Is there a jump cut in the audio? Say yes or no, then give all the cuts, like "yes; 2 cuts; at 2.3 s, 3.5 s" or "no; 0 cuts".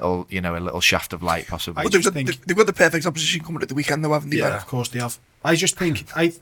no; 0 cuts